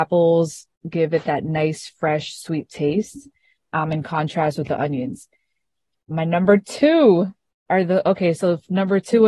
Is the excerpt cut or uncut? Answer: uncut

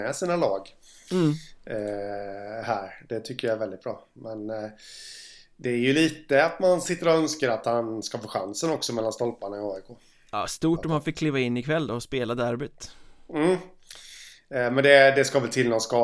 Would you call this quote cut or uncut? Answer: uncut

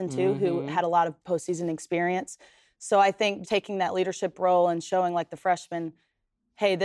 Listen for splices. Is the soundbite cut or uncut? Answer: cut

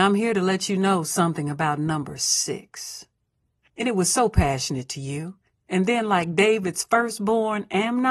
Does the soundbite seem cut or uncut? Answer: cut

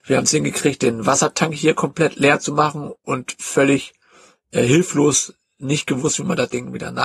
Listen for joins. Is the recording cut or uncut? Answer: uncut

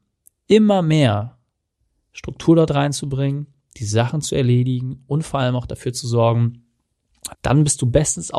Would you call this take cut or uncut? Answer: cut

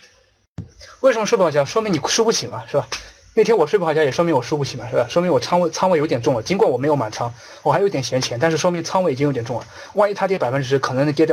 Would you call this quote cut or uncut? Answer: uncut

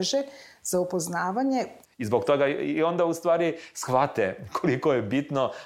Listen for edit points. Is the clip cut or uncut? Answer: cut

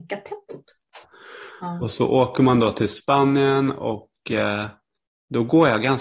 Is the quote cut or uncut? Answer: cut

